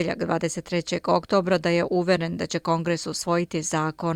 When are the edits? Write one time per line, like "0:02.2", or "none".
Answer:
none